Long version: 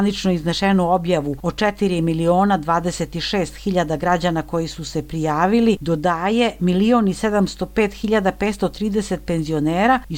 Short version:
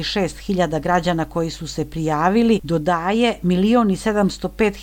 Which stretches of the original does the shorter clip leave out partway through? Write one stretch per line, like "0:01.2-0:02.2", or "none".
none